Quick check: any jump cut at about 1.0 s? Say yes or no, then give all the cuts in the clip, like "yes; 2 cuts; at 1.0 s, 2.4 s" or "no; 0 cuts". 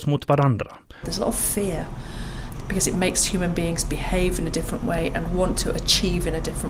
yes; 1 cut; at 1.0 s